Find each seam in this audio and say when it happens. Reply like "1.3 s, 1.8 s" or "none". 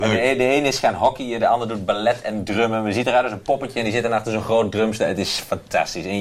none